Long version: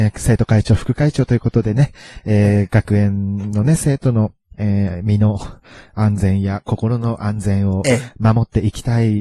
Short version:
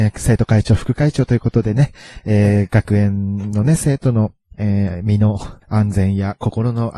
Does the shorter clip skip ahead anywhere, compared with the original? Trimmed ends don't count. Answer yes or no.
yes